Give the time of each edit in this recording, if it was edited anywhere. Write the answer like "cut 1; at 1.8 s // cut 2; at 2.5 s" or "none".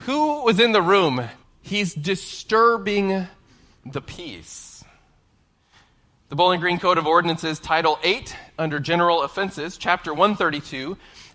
cut 1; at 1.4 s